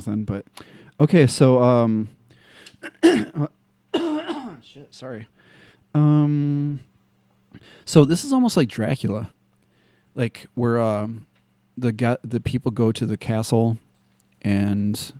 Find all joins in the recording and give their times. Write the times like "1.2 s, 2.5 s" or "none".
none

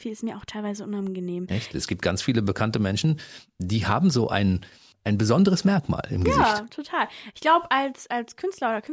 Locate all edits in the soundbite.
1.7 s

